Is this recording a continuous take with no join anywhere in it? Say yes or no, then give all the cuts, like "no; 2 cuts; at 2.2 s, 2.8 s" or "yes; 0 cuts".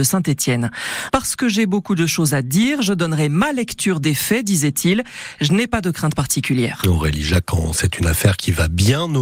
no; 1 cut; at 1.1 s